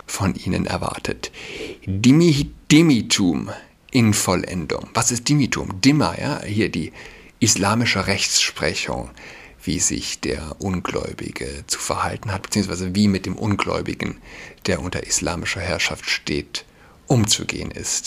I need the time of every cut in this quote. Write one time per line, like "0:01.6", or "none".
none